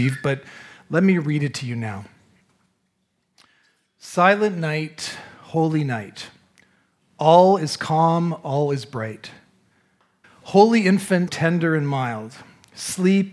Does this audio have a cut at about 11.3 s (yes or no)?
yes